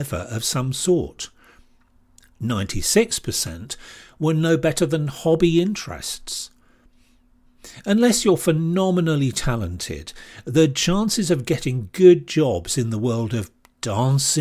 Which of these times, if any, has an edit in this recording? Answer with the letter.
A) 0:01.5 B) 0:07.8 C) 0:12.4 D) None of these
D